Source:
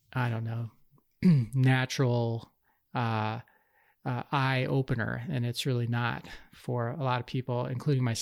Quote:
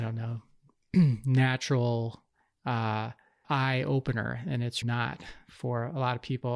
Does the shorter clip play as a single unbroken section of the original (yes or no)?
no